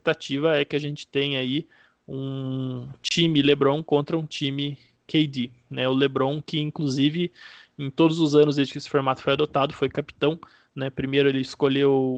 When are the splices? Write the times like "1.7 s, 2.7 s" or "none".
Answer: none